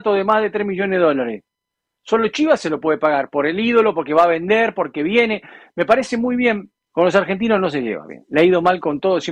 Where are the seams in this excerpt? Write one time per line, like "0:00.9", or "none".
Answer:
0:06.9